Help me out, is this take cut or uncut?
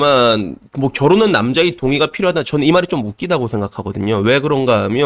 uncut